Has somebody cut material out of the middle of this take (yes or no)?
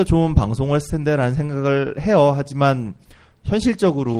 no